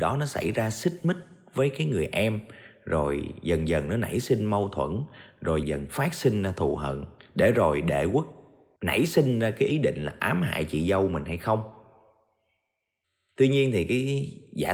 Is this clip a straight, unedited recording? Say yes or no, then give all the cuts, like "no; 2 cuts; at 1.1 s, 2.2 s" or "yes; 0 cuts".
no; 1 cut; at 5.6 s